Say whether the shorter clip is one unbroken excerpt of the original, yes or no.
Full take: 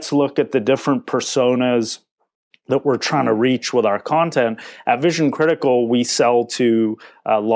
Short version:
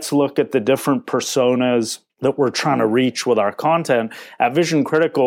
no